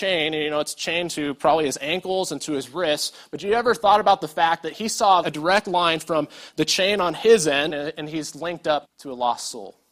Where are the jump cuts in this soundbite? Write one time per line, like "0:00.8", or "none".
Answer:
0:05.2
0:07.7
0:08.8